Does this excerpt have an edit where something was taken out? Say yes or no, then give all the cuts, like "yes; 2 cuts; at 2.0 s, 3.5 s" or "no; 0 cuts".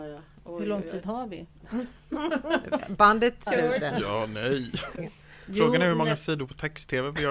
yes; 2 cuts; at 3.5 s, 5.0 s